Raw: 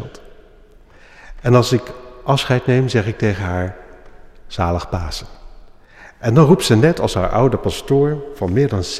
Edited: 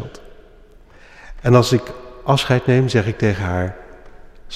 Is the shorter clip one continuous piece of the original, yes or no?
yes